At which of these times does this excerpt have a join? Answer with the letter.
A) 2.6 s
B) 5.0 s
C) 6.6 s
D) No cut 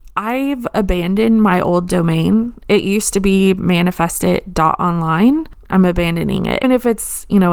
C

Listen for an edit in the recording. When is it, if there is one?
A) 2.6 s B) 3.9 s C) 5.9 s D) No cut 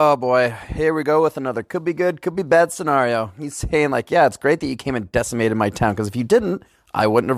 D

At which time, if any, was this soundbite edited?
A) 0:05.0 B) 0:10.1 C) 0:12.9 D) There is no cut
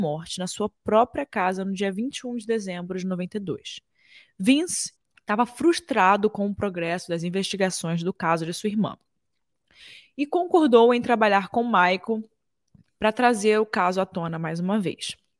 A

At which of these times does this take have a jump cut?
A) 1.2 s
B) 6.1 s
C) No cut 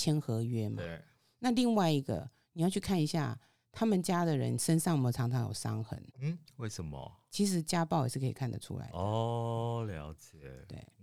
B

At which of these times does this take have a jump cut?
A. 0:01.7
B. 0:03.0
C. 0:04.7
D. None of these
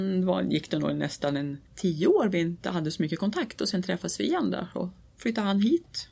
A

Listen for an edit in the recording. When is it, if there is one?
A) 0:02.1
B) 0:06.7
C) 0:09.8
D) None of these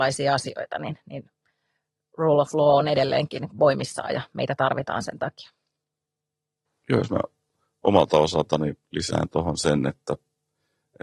D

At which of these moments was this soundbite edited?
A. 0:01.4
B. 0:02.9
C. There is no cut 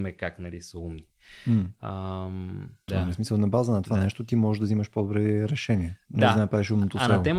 B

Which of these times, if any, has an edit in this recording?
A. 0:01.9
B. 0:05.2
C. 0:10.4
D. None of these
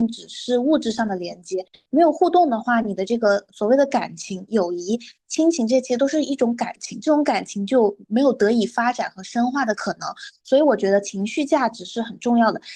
A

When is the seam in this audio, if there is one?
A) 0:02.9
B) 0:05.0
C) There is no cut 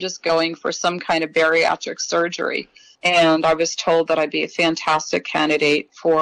A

